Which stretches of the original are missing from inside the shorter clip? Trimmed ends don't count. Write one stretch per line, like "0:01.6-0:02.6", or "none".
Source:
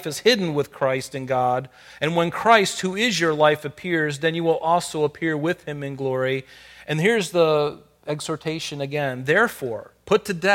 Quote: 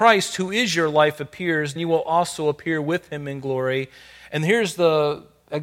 0:04.2-0:04.3

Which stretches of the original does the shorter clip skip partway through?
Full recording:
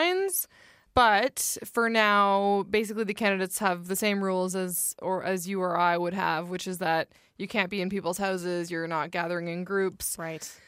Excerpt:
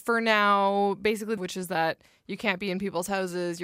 0:03.1-0:06.5

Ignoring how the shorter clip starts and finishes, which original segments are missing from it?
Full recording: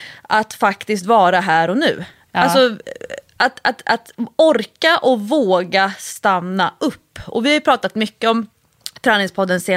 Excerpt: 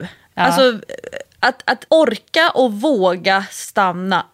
0:03.8-0:04.3

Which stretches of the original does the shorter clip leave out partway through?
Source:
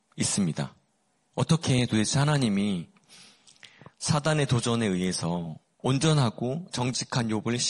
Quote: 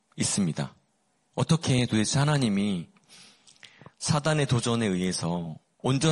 none

